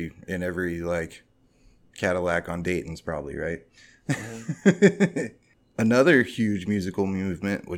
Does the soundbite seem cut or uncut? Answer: uncut